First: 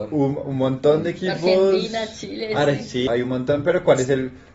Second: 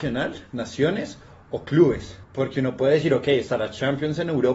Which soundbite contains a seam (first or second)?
first